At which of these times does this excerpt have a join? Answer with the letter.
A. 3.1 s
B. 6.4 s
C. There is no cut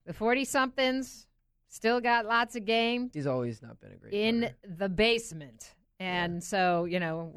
A